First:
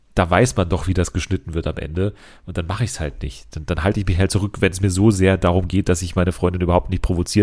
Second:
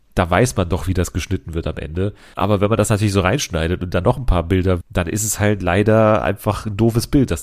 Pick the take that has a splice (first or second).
second